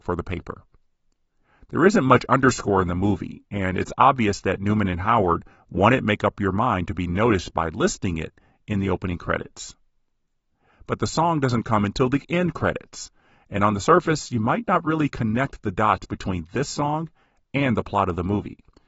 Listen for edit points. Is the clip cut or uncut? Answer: uncut